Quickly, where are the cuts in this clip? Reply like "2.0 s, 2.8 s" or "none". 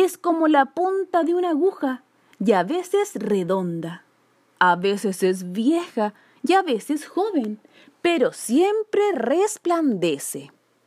none